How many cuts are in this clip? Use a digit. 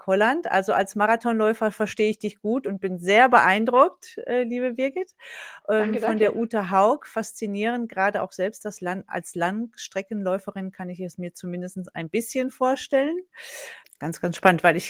1